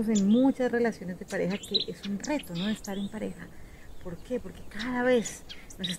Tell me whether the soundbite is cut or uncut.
uncut